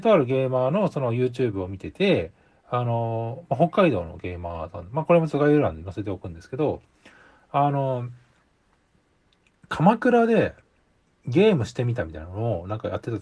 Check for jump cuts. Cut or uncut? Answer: uncut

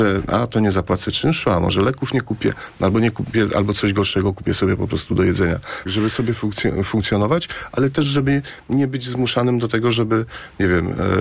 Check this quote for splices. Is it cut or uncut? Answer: cut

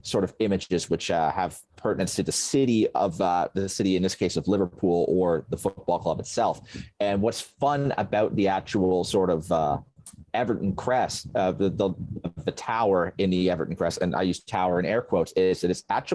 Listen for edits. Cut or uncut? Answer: cut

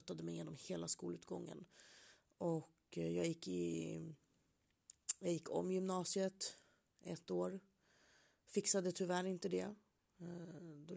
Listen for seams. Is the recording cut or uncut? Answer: uncut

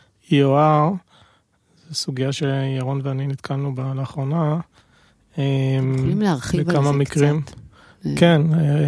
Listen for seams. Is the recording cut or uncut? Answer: uncut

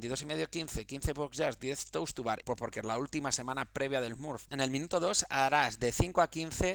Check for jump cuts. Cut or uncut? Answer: cut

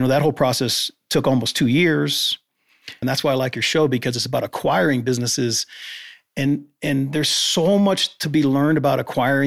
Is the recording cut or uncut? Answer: cut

